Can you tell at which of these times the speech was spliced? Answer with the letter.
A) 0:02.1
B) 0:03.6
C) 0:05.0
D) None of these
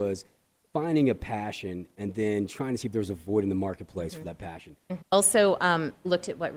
C